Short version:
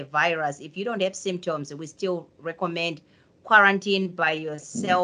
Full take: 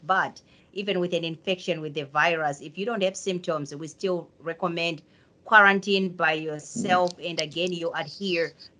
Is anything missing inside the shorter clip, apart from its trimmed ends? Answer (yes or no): no